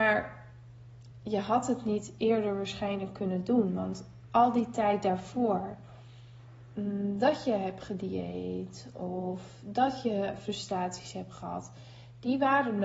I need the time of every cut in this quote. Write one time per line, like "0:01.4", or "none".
none